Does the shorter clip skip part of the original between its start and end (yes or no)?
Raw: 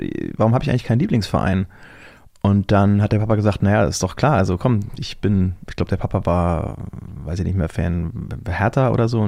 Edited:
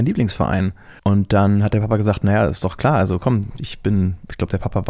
yes